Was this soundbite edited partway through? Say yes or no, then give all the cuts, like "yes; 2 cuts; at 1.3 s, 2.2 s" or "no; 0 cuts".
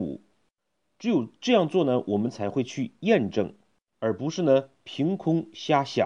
yes; 1 cut; at 3.9 s